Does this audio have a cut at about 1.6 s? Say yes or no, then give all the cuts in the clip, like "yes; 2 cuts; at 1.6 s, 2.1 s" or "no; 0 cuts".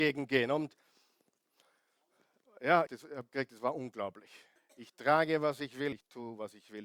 no; 3 cuts; at 2.9 s, 4.6 s, 5.9 s